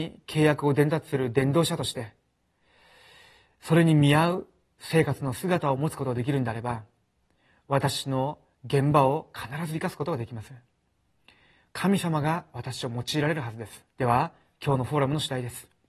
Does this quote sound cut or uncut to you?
cut